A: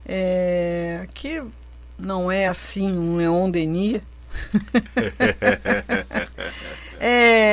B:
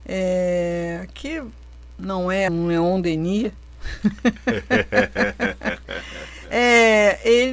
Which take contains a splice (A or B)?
B